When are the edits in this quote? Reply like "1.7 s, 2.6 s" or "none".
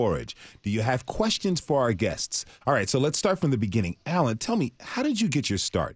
2.6 s